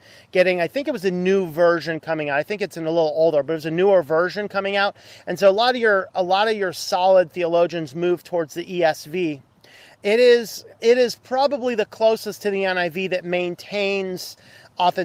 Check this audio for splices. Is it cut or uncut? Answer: uncut